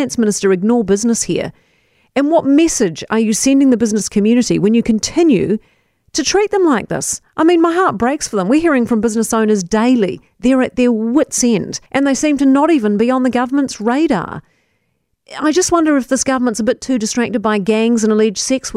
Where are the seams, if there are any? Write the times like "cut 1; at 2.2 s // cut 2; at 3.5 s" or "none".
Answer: cut 1; at 11.9 s